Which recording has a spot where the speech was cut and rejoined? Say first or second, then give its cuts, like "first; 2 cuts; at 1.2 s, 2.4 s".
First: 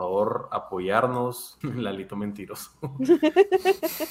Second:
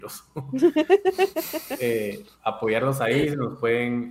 first; 1 cut; at 1.6 s